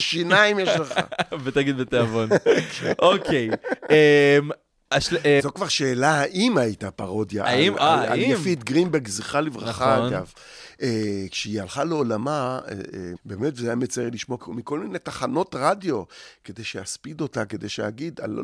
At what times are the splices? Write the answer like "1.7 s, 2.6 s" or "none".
5.4 s, 13.2 s, 14.4 s